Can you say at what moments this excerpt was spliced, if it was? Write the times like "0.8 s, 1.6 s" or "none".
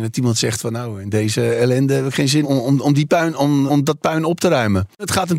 2.4 s, 3.7 s